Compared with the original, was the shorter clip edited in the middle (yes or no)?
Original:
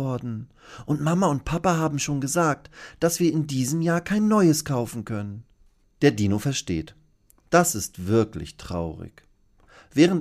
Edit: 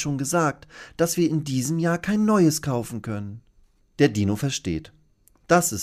no